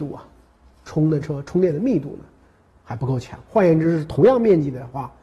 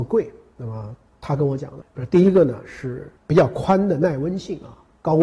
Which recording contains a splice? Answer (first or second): second